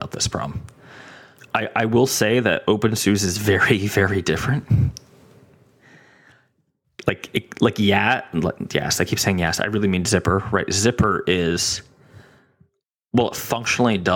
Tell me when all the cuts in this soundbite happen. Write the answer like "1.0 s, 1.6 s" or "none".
none